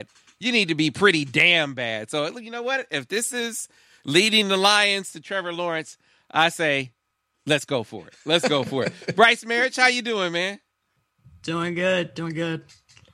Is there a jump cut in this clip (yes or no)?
no